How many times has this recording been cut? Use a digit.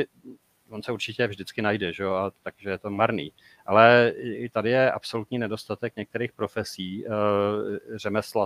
0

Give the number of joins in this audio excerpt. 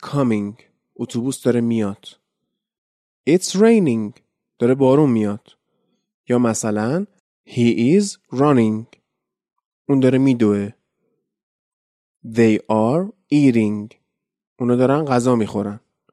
0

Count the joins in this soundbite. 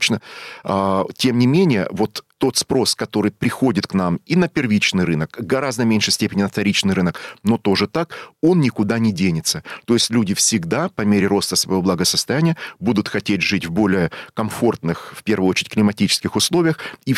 1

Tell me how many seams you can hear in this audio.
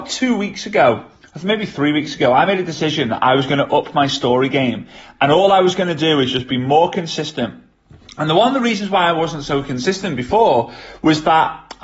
0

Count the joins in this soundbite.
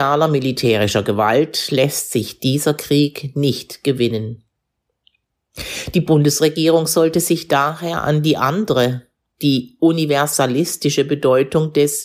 0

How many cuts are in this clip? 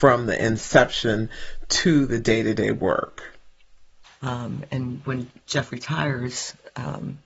1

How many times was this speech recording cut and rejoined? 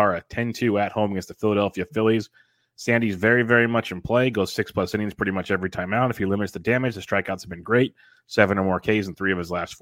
0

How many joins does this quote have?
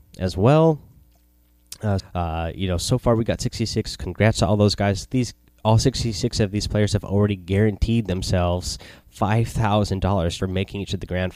2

